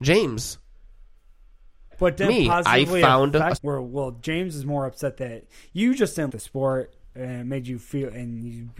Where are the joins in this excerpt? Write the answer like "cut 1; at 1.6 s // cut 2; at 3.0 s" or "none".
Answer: cut 1; at 1.9 s // cut 2; at 3.6 s // cut 3; at 6.3 s